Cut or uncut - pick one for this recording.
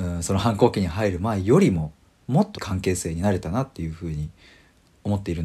cut